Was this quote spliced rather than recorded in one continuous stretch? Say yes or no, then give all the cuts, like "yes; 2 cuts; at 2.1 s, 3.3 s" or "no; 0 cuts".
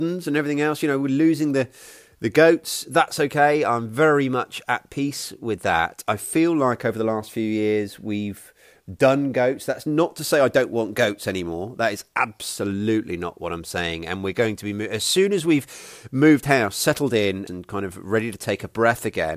yes; 1 cut; at 17.5 s